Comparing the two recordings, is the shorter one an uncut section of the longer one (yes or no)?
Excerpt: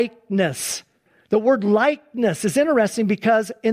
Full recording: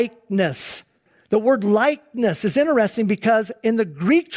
yes